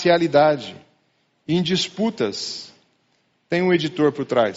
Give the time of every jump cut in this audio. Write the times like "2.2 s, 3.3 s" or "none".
3.4 s